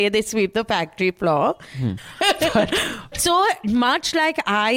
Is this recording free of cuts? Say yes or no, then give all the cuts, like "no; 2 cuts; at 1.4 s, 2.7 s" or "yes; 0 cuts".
no; 2 cuts; at 2.0 s, 3.1 s